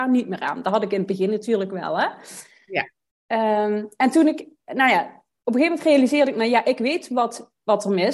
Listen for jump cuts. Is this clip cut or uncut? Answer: uncut